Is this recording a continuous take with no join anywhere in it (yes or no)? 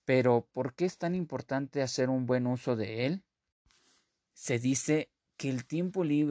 yes